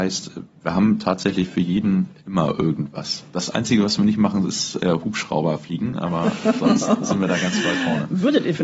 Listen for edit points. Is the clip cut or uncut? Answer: uncut